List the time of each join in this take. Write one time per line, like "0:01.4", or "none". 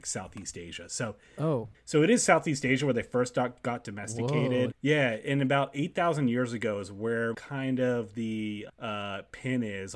0:04.7
0:07.3
0:08.7